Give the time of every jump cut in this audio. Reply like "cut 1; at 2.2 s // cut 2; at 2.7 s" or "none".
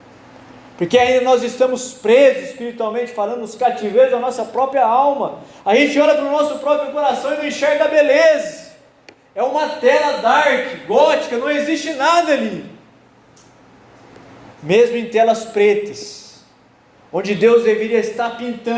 cut 1; at 14.5 s